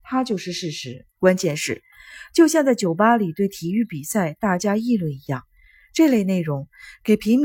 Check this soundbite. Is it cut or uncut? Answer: cut